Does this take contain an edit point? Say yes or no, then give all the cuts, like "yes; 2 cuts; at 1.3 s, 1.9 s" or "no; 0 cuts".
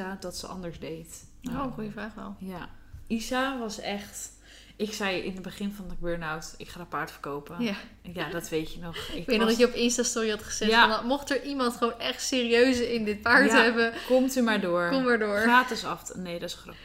no; 0 cuts